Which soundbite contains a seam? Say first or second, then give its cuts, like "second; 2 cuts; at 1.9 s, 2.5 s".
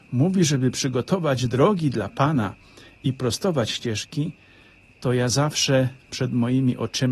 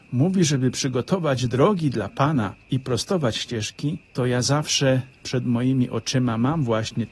second; 2 cuts; at 2.6 s, 4.0 s